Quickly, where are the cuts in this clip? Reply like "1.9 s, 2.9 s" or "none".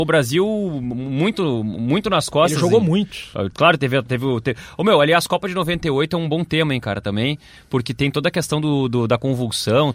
none